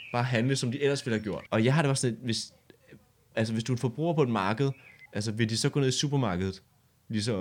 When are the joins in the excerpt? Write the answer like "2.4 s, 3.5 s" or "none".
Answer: 1.5 s, 3.3 s, 5.1 s